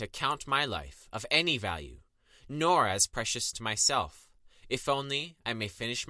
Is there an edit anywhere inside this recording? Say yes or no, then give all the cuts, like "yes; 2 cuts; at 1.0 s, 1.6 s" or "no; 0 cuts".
no; 0 cuts